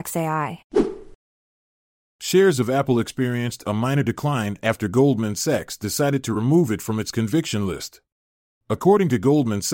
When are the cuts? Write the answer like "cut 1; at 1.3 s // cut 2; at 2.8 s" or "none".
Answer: cut 1; at 8.6 s